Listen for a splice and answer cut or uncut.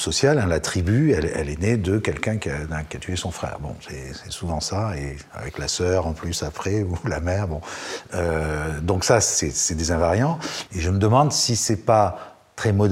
cut